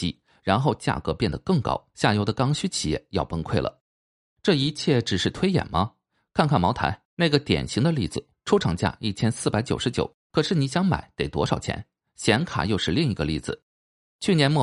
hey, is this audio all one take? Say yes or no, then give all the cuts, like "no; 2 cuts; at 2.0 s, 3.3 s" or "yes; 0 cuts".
yes; 0 cuts